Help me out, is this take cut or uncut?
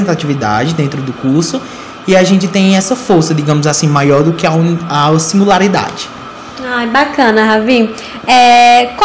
uncut